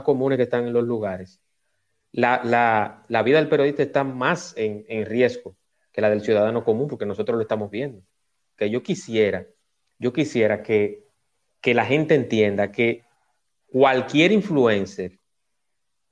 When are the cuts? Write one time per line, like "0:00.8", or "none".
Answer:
0:08.6

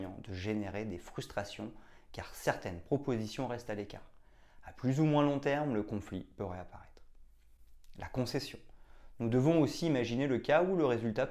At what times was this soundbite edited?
none

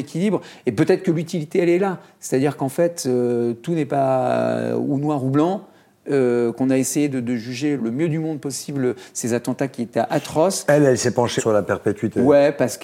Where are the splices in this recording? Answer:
0:07.8
0:11.4

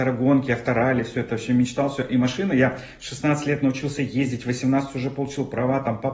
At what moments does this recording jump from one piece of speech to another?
none

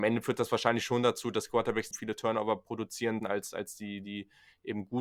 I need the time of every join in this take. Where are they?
0:01.9
0:03.2

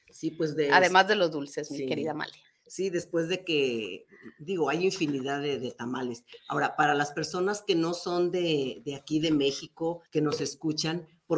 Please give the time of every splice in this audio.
0:10.1

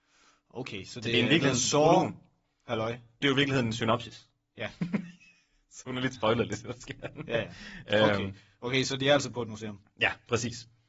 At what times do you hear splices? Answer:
0:03.2

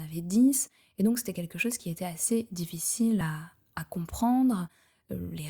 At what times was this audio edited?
none

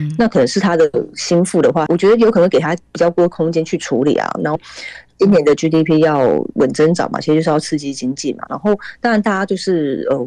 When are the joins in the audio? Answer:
0:04.6
0:08.5

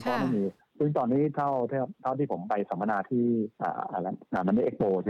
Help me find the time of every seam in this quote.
0:03.5

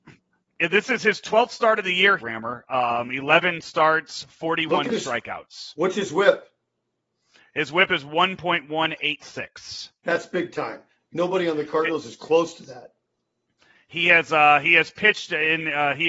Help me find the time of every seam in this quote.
0:02.2
0:11.0

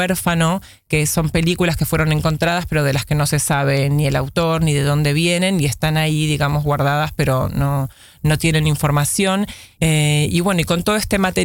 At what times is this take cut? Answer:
0:09.7

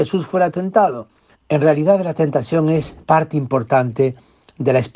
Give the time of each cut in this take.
0:01.3
0:03.0

